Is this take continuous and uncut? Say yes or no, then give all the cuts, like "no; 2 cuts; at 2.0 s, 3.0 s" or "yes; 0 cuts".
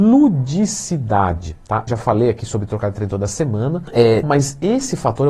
no; 2 cuts; at 1.9 s, 4.2 s